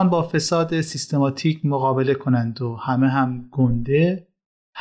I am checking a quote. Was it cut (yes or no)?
no